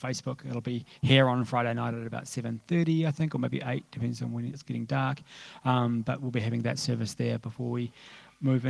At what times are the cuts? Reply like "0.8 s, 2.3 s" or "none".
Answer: none